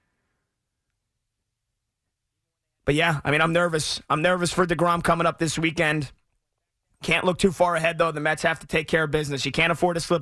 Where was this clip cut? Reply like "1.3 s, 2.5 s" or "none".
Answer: none

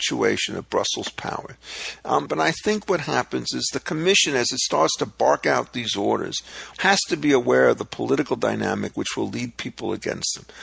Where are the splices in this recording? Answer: 2.3 s, 6.7 s

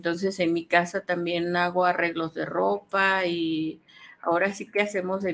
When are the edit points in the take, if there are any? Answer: none

